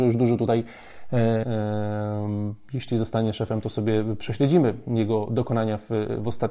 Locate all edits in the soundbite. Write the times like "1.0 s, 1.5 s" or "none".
1.4 s